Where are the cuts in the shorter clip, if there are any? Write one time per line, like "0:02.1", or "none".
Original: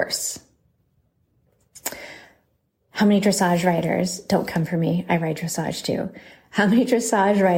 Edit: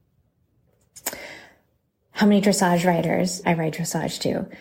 0:03.4